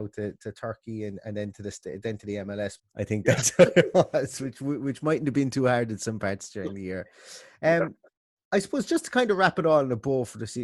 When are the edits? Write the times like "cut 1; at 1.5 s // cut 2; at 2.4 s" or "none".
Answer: cut 1; at 2.8 s